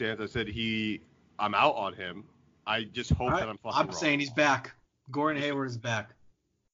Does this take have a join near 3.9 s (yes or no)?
no